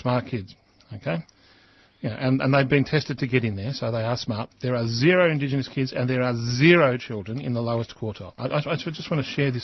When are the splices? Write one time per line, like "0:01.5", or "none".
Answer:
0:04.5
0:08.4